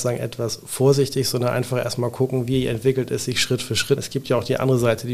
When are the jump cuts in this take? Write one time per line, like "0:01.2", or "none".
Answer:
0:04.0